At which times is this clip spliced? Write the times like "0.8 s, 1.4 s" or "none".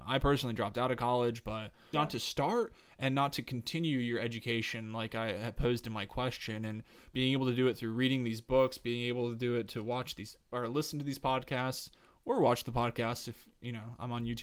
1.9 s